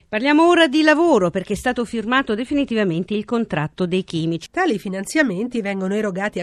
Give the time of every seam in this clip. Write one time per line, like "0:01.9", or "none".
0:04.5

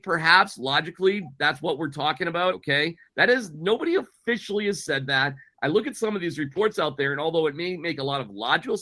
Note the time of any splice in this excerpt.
0:02.5

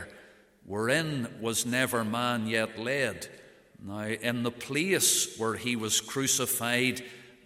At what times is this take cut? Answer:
0:03.7

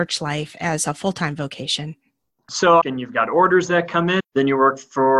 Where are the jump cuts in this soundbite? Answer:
0:02.8
0:04.2

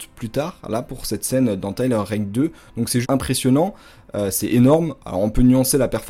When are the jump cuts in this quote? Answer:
0:03.0

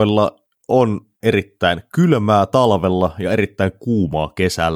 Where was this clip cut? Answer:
0:01.2

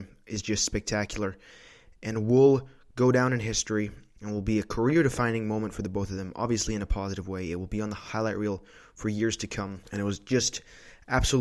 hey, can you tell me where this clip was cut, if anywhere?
none

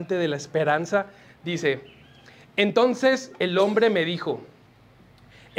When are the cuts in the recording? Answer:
none

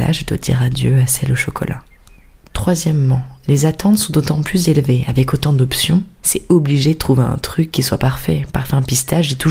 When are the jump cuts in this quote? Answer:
none

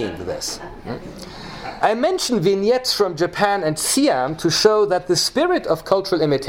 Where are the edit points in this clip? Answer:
0:01.8

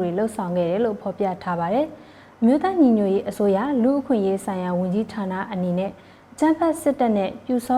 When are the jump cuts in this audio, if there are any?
none

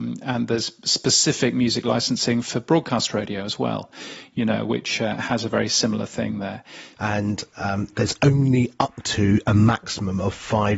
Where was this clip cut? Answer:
0:07.0

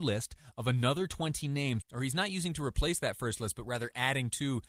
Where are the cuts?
0:01.8

